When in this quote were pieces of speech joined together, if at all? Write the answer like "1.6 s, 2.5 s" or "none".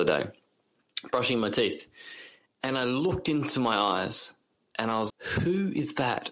5.1 s

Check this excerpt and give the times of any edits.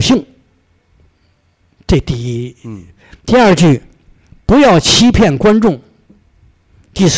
none

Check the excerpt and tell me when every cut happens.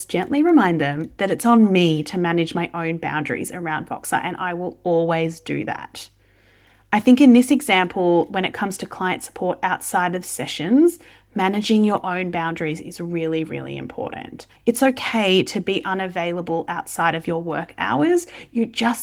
14.6 s

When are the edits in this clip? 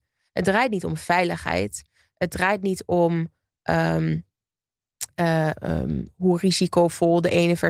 5.6 s

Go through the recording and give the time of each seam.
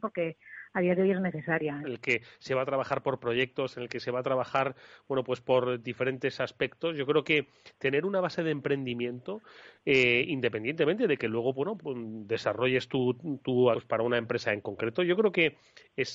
1.8 s, 11.8 s, 13.7 s

